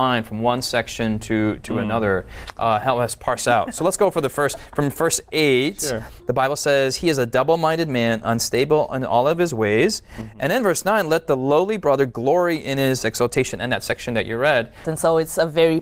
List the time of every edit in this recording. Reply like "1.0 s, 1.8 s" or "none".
14.8 s